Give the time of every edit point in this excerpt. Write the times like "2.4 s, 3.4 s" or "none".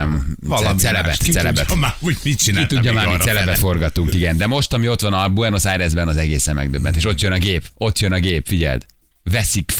none